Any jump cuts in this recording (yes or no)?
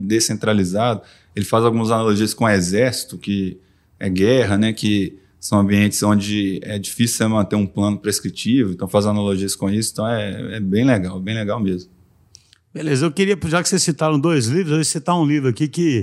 no